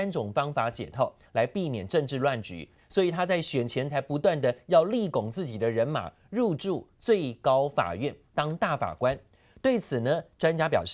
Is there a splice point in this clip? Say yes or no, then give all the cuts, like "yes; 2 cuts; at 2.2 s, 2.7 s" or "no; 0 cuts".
yes; 1 cut; at 2.8 s